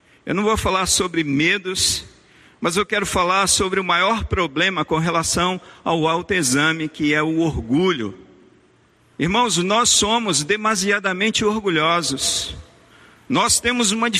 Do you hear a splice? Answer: yes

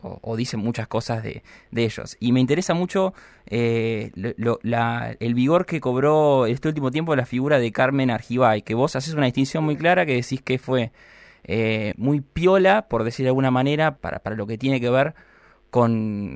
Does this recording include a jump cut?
yes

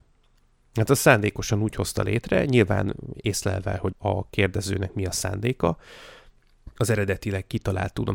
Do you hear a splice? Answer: yes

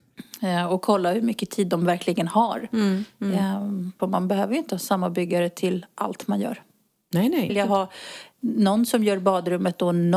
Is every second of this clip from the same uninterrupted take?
no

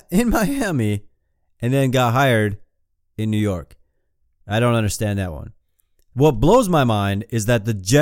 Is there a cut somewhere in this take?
no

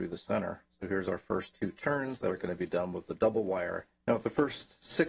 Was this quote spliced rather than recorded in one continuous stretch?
yes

